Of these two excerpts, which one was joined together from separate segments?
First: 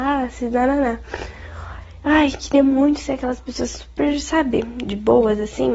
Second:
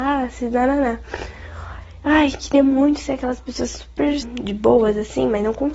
second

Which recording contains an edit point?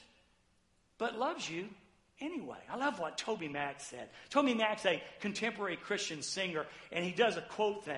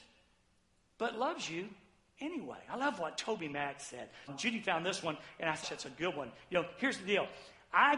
second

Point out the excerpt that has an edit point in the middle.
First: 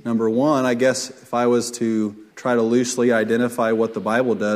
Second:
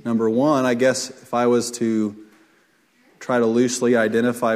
first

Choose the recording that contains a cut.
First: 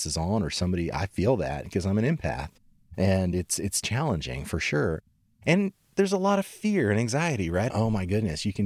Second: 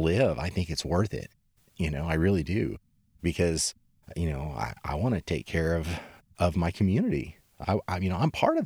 first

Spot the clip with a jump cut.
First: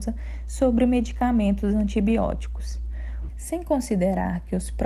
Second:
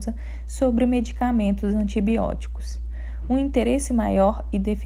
first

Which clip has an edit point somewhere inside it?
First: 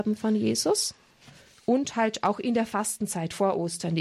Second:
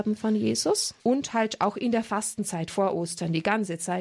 second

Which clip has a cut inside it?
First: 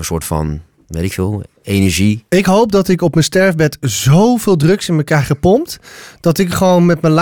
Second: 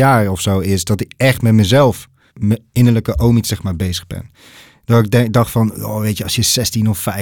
second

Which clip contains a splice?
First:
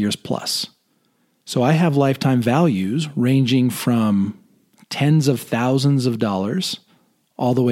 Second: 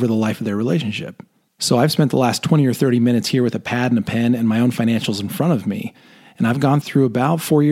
second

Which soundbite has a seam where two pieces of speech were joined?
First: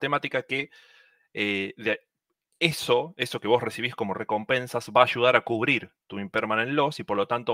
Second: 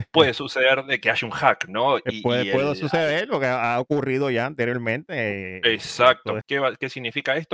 second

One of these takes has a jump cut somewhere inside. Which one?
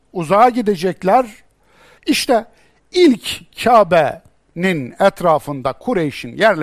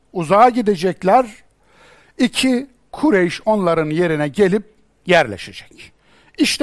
first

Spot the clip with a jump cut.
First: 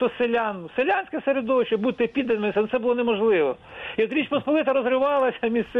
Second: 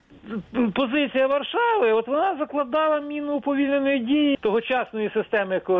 second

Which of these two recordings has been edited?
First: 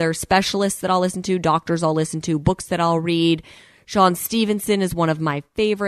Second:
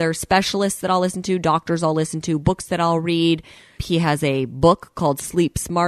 second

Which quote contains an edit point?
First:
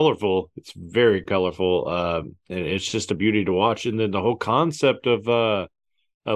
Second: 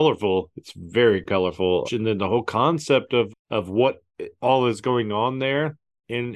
second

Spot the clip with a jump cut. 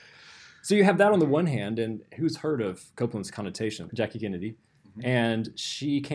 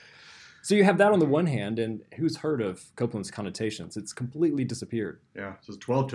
first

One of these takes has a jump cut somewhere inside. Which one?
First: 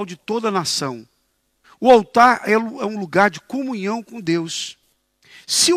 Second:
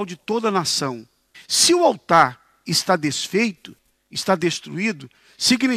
second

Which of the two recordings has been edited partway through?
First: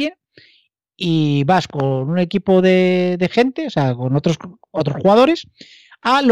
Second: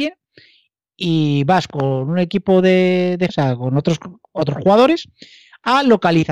second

